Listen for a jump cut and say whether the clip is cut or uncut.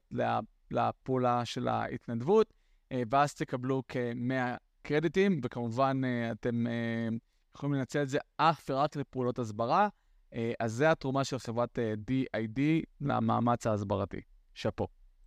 uncut